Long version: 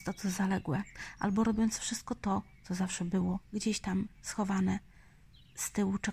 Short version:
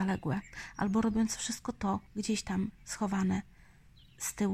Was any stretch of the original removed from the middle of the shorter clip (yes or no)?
yes